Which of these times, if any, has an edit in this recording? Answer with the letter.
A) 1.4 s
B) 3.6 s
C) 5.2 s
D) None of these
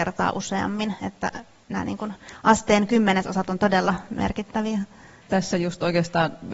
C